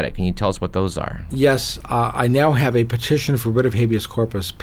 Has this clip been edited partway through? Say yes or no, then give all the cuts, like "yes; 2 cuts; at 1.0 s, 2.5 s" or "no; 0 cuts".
no; 0 cuts